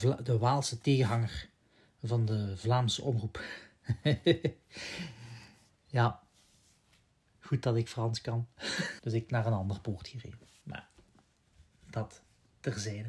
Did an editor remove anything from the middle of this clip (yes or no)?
yes